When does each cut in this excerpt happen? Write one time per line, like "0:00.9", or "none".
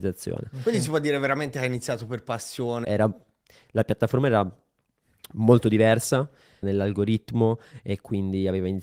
0:02.8
0:06.6